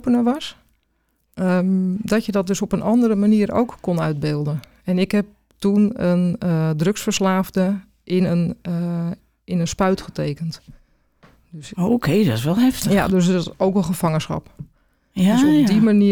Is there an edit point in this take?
no; 0 cuts

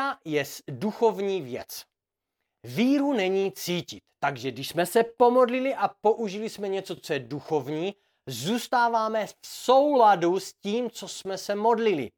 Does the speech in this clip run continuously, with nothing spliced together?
yes; 0 cuts

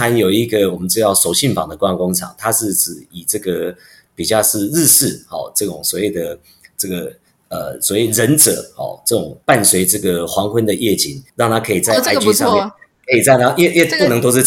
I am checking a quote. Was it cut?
yes; 2 cuts; at 9.4 s, 11.3 s

